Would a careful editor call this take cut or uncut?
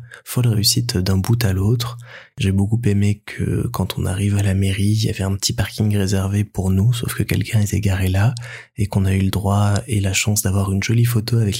uncut